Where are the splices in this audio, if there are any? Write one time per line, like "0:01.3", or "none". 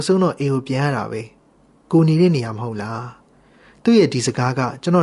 none